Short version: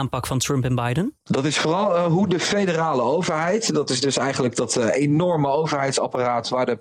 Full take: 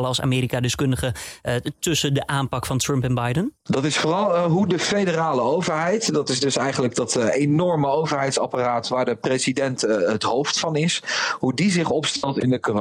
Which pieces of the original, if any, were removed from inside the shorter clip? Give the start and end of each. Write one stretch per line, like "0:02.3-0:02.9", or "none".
none